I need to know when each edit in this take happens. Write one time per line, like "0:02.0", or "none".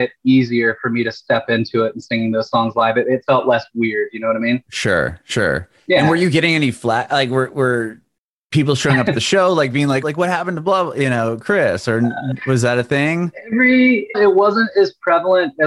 0:10.0
0:14.1